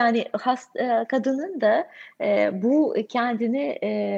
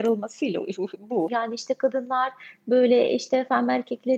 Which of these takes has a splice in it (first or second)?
second